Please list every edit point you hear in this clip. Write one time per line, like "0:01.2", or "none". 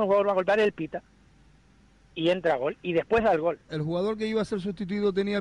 0:02.1
0:03.7